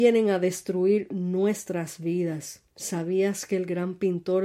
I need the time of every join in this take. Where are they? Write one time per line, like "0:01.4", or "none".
0:02.7